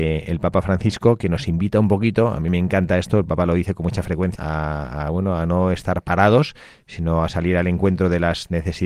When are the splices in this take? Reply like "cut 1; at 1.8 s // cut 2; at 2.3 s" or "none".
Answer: cut 1; at 4.4 s